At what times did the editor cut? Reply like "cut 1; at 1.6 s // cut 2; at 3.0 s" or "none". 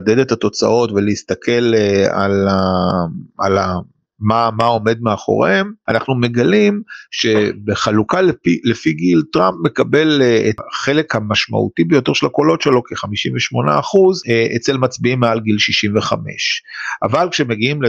none